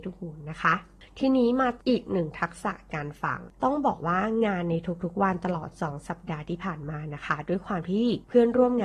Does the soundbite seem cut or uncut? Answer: cut